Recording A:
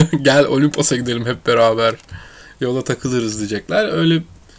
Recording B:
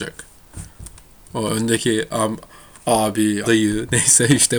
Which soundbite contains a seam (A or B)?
B